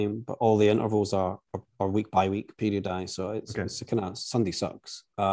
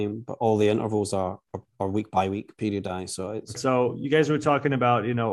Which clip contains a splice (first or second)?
second